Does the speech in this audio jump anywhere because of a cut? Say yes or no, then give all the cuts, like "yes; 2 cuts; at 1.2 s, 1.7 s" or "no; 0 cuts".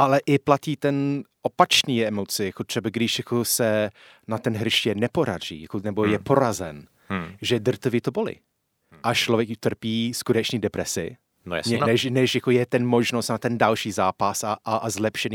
yes; 1 cut; at 11.8 s